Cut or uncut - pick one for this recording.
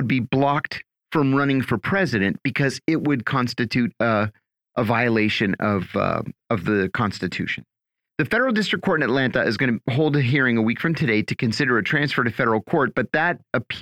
uncut